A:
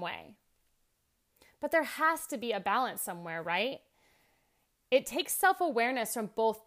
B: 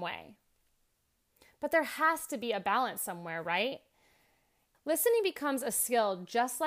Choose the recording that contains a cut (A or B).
B